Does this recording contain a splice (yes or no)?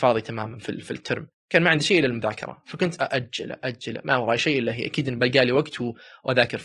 yes